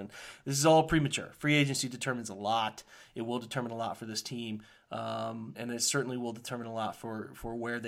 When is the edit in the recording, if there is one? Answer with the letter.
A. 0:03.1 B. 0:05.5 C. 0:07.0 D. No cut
B